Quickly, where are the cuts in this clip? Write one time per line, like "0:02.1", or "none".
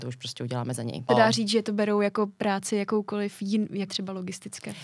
0:01.1
0:03.9